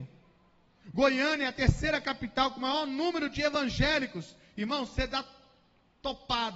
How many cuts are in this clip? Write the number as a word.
zero